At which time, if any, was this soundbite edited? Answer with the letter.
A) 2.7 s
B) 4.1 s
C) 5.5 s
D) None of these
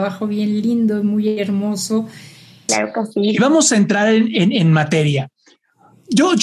A